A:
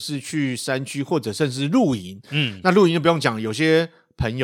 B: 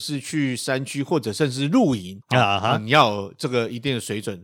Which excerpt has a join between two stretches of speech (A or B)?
B